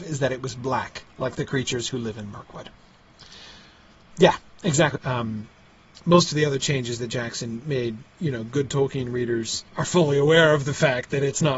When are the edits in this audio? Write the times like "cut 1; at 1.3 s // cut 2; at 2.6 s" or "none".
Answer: cut 1; at 5.0 s // cut 2; at 9.7 s